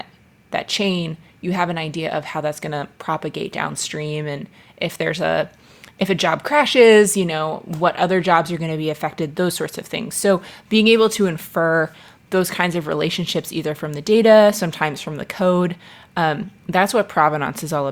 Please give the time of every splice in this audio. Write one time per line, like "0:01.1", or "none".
none